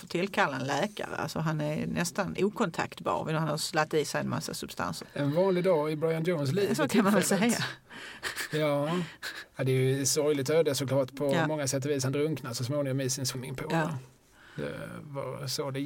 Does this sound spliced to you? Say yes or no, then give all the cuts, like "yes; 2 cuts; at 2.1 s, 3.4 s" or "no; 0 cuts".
yes; 1 cut; at 5.0 s